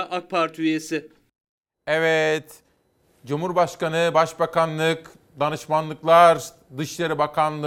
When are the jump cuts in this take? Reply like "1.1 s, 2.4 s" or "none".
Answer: none